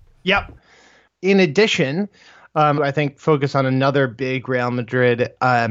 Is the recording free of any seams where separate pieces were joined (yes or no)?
no